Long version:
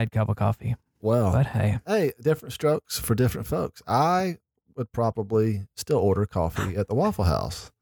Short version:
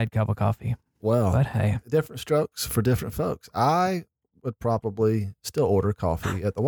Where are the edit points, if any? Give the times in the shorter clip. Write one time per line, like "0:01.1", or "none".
0:01.8